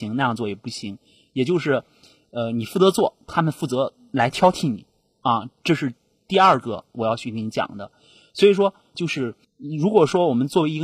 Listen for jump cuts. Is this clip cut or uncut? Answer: cut